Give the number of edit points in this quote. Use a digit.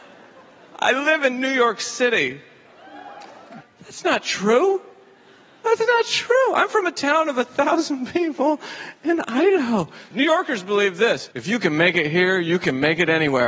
3